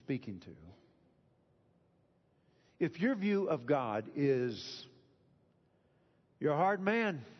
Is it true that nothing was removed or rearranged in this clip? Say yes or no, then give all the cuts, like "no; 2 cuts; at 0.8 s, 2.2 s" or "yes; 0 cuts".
yes; 0 cuts